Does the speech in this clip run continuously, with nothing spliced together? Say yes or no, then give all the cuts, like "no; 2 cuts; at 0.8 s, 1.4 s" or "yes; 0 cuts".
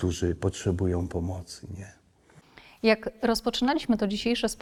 yes; 0 cuts